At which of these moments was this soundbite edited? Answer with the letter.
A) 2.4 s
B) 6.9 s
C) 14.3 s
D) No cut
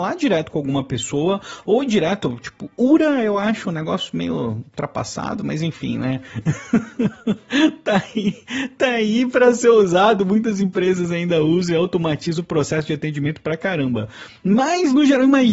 D